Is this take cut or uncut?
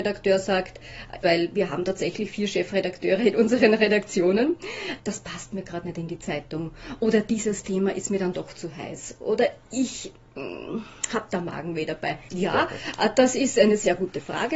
cut